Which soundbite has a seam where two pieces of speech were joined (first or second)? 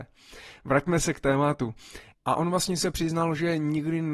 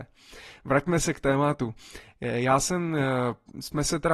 first